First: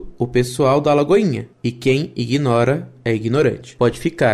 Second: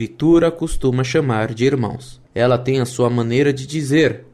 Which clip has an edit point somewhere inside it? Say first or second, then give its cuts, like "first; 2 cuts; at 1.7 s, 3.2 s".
second; 1 cut; at 2.2 s